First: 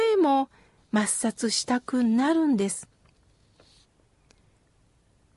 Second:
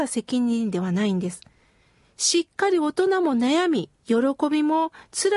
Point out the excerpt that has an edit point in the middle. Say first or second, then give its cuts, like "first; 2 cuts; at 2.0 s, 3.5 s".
second; 1 cut; at 4.0 s